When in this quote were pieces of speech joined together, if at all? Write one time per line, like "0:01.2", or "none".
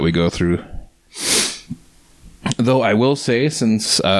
none

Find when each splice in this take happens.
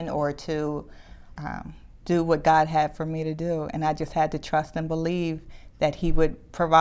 0:01.3

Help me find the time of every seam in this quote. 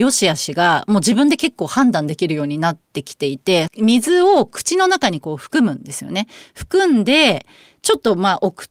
0:03.7

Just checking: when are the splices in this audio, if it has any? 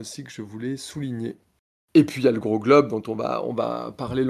0:01.8

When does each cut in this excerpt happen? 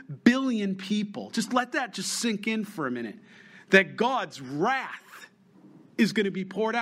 none

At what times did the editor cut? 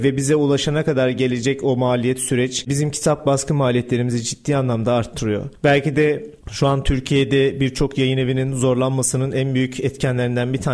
0:05.6

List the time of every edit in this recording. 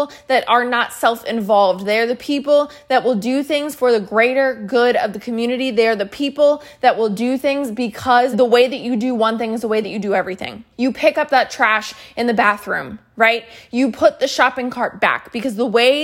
0:08.3
0:10.7

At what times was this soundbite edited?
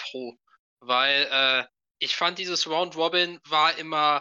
none

